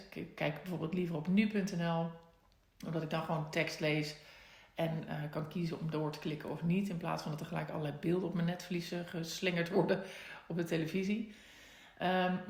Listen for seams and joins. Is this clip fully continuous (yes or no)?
yes